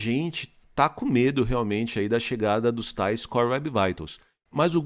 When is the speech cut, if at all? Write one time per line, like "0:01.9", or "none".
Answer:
none